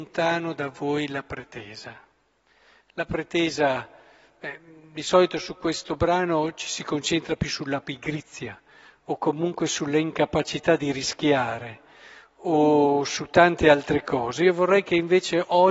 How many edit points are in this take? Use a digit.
0